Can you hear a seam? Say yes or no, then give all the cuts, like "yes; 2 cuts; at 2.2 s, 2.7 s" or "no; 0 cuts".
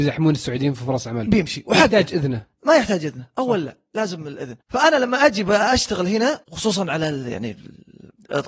yes; 3 cuts; at 1.3 s, 4.6 s, 6.4 s